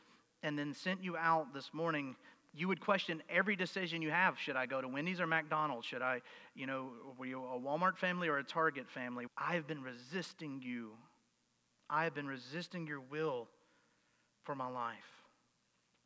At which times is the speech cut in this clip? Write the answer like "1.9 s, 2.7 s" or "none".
9.3 s